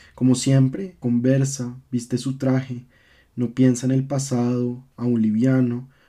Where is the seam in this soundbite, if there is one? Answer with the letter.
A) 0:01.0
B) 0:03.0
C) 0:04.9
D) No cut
A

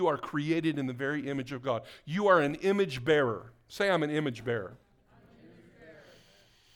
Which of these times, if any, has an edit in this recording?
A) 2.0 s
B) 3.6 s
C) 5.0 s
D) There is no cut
D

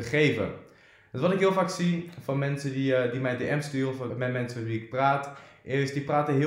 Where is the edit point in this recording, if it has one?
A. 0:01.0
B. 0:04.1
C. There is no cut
B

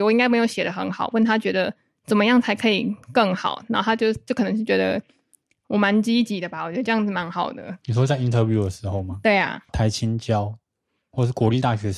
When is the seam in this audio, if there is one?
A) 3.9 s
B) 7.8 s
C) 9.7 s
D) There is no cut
C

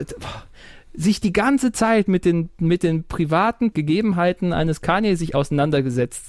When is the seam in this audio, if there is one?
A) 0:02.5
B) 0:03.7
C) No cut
B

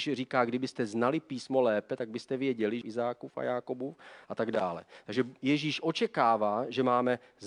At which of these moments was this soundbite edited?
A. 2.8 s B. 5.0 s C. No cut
A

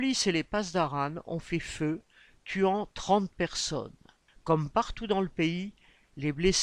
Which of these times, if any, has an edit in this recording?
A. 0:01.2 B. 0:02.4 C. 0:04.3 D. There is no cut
C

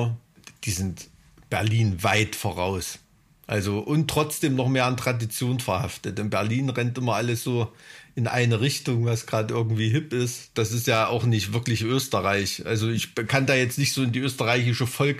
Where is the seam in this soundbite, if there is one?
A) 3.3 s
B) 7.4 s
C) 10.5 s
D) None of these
C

